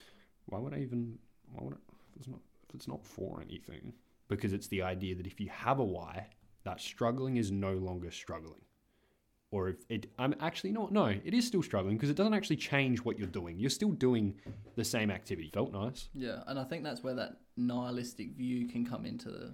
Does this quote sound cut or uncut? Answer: cut